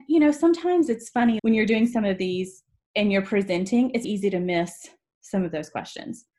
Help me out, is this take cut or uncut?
cut